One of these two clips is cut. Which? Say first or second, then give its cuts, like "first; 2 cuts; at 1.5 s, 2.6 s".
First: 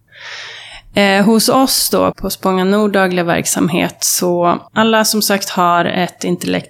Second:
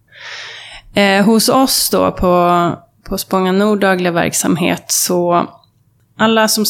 first; 2 cuts; at 2.1 s, 4.7 s